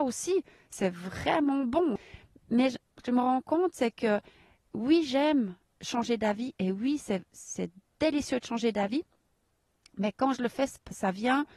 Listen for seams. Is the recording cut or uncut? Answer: uncut